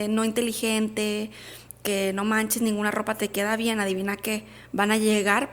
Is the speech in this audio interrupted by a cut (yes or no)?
no